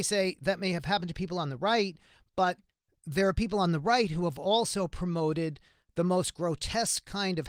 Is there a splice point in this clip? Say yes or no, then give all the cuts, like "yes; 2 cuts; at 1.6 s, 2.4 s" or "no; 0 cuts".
no; 0 cuts